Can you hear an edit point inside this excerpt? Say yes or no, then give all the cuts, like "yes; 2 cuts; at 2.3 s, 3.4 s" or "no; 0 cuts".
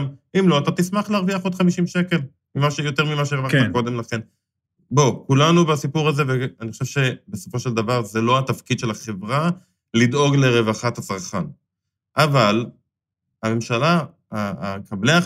no; 0 cuts